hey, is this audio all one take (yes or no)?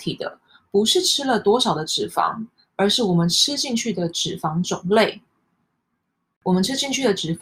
yes